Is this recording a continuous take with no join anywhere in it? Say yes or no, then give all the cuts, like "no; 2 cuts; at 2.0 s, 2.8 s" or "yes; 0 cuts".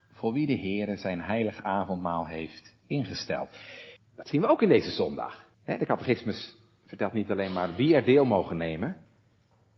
no; 2 cuts; at 4.0 s, 5.5 s